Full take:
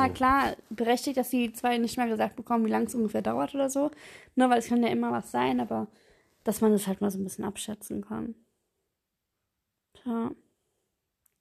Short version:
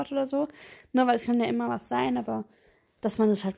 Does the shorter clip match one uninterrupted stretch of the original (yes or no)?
yes